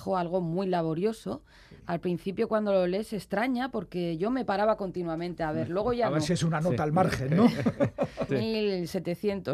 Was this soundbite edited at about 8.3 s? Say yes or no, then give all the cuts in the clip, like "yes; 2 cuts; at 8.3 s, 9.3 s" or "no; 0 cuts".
yes; 1 cut; at 8.3 s